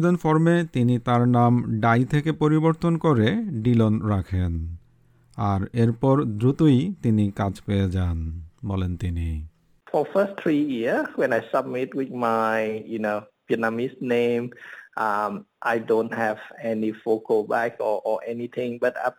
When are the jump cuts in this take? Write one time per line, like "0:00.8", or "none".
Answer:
none